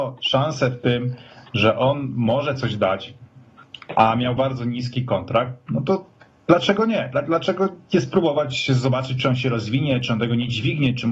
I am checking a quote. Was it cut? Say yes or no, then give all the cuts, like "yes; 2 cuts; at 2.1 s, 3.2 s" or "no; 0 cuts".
yes; 1 cut; at 4.4 s